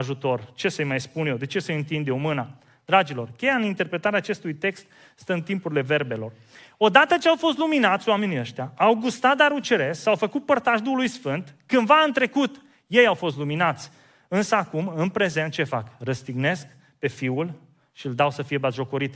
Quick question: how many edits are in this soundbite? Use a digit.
0